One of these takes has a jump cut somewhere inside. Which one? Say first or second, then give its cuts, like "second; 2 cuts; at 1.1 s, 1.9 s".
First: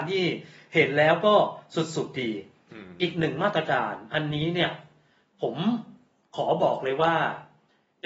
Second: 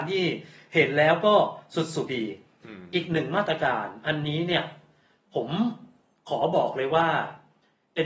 second; 1 cut; at 2.1 s